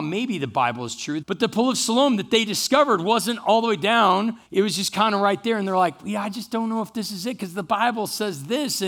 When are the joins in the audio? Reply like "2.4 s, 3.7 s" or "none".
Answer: 1.2 s, 4.5 s